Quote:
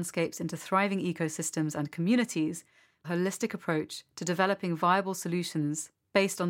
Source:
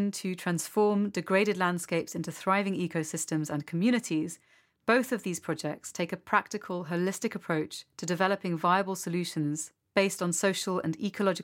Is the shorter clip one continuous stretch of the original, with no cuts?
no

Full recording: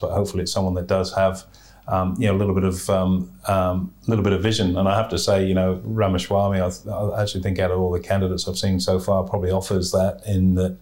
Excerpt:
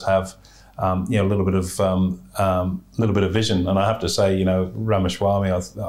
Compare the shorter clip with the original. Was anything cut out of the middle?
no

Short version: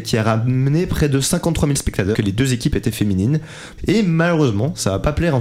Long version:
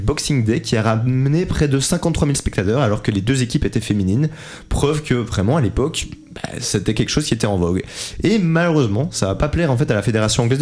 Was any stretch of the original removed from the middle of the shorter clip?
yes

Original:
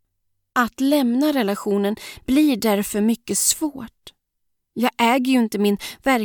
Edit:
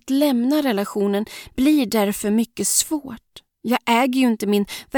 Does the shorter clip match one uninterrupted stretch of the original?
no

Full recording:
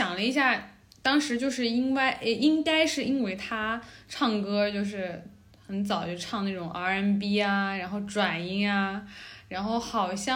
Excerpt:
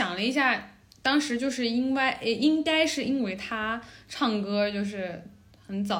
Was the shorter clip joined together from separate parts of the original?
no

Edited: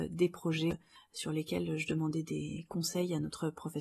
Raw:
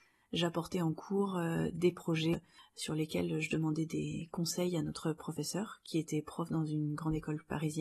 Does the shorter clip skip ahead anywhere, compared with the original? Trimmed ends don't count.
no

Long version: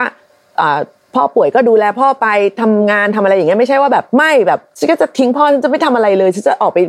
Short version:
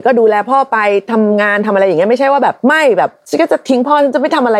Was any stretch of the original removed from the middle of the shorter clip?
no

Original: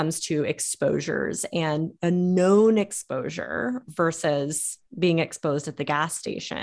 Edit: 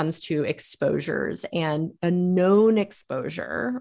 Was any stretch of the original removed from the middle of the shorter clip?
no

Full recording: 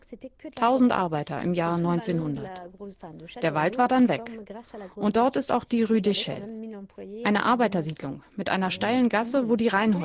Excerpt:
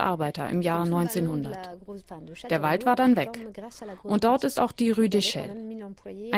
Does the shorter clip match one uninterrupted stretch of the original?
yes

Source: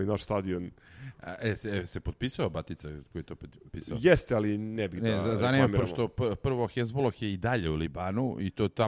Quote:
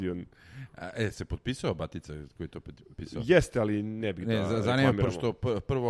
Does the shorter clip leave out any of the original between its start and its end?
yes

